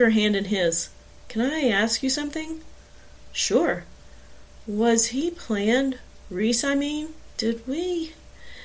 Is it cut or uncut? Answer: uncut